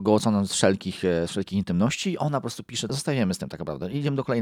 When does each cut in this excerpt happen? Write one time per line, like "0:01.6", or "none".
0:02.9